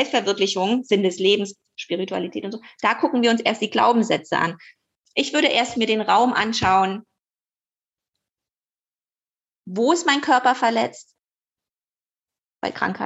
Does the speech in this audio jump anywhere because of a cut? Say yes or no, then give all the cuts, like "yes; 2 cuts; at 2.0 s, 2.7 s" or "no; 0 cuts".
yes; 1 cut; at 5.7 s